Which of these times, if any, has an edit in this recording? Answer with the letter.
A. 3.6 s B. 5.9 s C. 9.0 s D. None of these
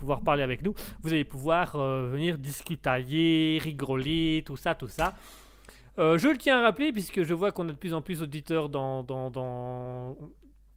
C